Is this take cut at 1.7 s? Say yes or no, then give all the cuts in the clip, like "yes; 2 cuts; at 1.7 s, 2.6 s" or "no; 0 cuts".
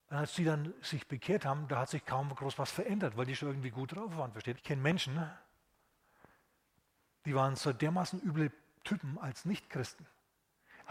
no; 1 cut; at 4.5 s